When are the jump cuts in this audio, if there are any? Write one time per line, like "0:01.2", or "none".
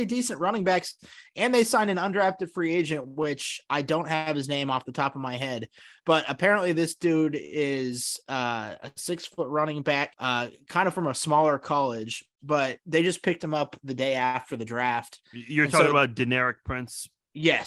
0:10.1